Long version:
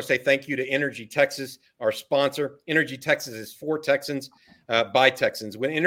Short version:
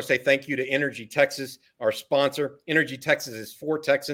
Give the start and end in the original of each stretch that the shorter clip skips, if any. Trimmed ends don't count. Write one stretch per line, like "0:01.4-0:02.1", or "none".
none